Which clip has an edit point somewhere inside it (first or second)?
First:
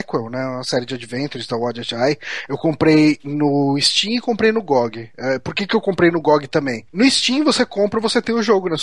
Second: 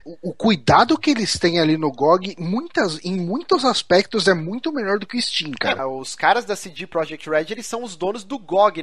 second